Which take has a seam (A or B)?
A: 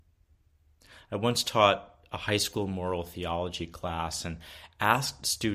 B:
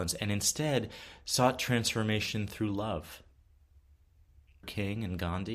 B